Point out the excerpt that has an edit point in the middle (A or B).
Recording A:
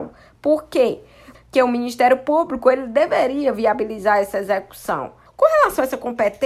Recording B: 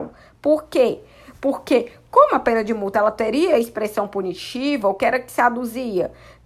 A